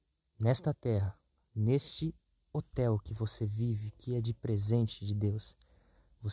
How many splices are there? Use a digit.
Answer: 0